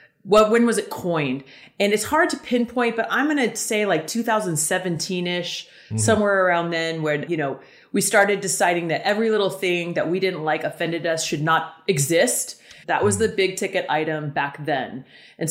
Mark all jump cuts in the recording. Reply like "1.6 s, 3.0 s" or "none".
7.3 s, 12.8 s